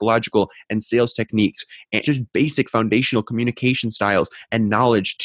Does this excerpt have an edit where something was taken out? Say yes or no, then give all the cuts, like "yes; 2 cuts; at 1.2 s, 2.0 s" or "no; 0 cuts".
yes; 1 cut; at 2.0 s